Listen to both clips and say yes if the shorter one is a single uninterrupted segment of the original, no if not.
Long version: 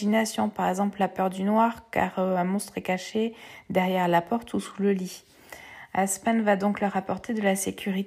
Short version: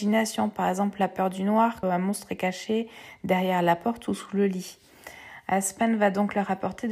no